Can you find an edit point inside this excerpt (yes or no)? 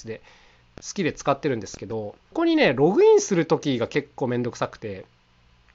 yes